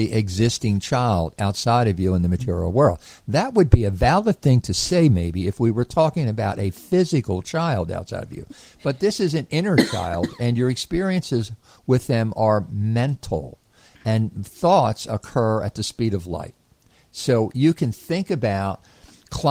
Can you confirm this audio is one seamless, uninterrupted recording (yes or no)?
yes